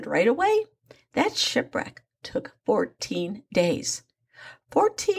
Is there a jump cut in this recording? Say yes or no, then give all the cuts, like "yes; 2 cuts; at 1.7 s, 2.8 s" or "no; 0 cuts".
no; 0 cuts